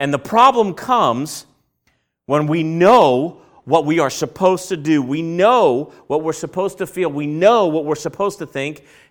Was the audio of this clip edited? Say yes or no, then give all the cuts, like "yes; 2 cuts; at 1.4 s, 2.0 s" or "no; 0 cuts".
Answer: no; 0 cuts